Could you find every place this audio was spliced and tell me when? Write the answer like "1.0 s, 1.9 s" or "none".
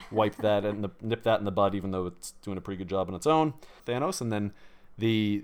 3.8 s